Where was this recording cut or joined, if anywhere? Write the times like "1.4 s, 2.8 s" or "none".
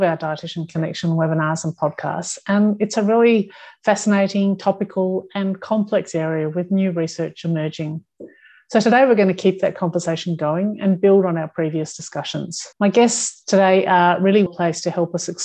12.7 s, 14.5 s